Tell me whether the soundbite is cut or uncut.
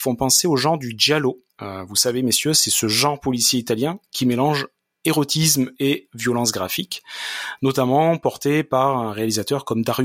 cut